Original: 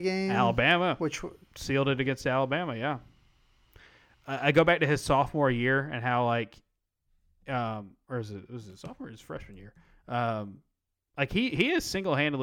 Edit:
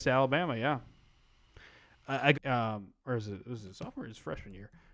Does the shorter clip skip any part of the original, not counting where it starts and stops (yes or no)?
yes